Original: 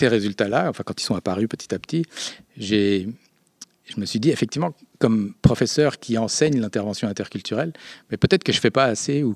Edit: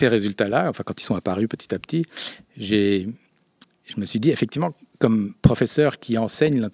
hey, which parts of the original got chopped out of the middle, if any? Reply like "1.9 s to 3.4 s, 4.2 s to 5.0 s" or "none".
none